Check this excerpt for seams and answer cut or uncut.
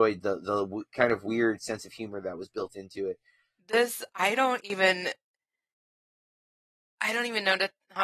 cut